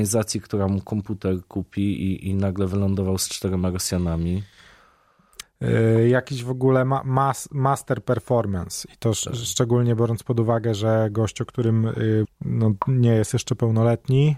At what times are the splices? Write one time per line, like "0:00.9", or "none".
0:05.4
0:12.2